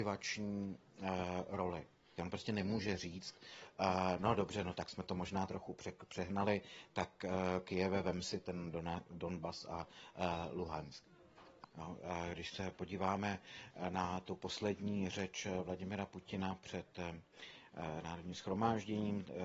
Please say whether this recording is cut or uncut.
cut